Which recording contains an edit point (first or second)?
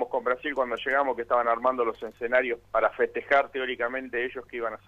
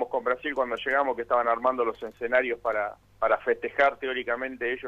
first